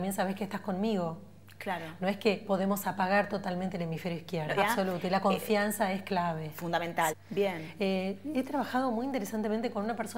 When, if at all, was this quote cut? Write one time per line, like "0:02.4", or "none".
0:04.6
0:07.1